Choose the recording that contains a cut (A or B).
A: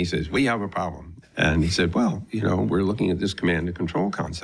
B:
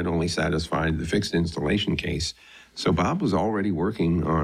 A